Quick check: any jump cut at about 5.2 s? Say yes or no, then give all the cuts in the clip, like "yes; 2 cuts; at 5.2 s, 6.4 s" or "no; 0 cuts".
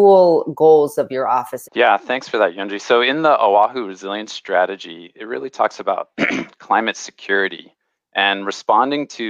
no; 1 cut; at 1.6 s